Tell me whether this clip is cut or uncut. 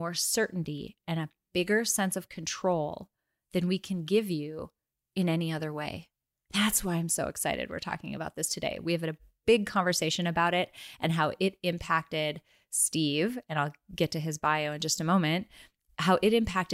uncut